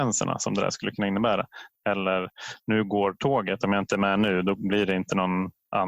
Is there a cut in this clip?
yes; 1 cut; at 1.7 s

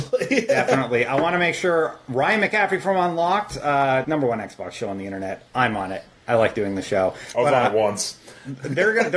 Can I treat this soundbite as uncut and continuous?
no; 1 cut; at 4.0 s

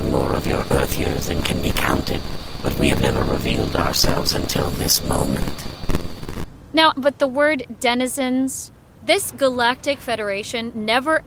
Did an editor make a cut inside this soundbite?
yes; 2 cuts; at 6.9 s, 9.0 s

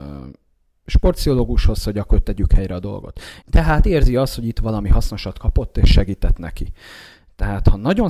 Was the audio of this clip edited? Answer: yes; 1 cut; at 3.4 s

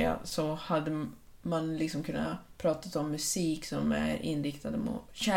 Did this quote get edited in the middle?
no; 0 cuts

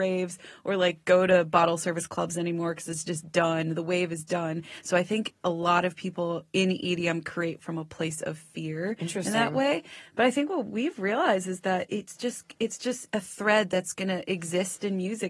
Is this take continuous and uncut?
yes; 0 cuts

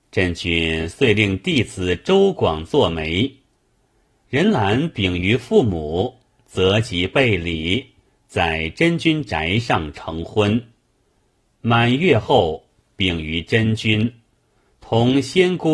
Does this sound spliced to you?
no; 0 cuts

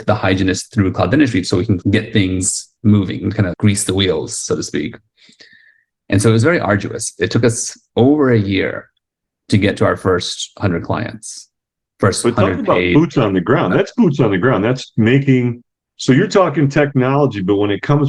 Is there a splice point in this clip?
yes; 2 cuts; at 1.8 s, 3.5 s

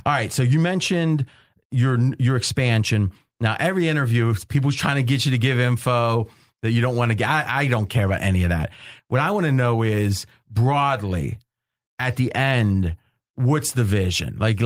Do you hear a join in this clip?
no; 0 cuts

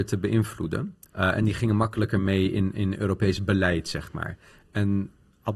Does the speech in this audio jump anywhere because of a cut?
yes; 1 cut; at 1.1 s

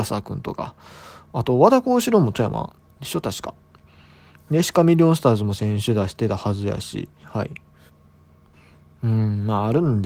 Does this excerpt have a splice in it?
yes; 1 cut; at 7.2 s

